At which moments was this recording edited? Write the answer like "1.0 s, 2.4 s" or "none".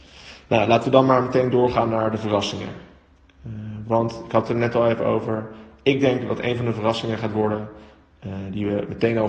none